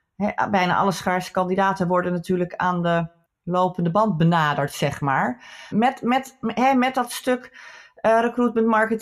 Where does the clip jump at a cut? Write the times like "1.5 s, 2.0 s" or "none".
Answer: 5.7 s